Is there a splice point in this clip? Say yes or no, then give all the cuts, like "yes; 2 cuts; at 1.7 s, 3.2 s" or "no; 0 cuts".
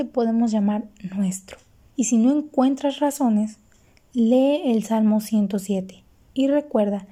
yes; 1 cut; at 1.9 s